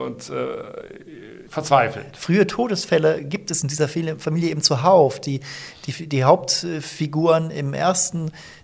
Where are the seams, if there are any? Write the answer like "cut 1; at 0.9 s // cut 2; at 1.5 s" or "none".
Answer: cut 1; at 1.5 s